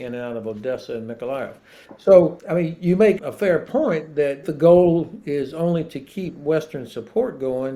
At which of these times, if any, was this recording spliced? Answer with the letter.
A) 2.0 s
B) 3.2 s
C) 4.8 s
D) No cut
B